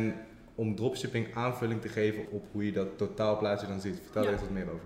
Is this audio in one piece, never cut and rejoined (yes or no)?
no